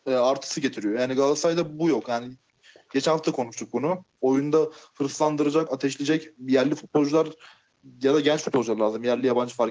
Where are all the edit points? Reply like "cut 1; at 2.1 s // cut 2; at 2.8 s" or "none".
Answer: cut 1; at 4.2 s // cut 2; at 5.7 s